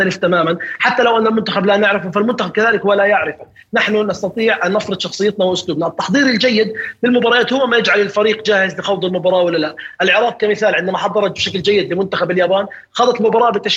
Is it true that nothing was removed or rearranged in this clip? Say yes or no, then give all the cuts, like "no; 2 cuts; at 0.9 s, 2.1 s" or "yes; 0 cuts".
yes; 0 cuts